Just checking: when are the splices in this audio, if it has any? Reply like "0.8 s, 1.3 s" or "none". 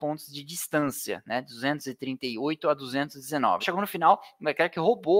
3.6 s

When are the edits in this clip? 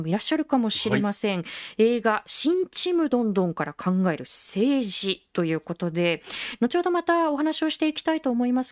none

